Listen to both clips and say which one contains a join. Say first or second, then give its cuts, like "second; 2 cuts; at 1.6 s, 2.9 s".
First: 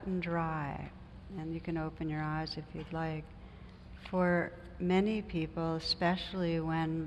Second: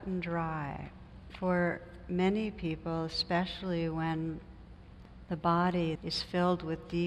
second; 2 cuts; at 1.3 s, 6.0 s